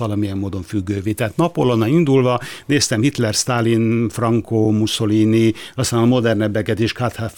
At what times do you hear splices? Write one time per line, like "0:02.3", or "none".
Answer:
none